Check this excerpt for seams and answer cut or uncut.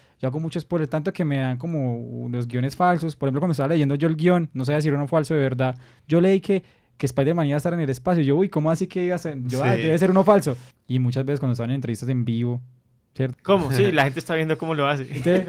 cut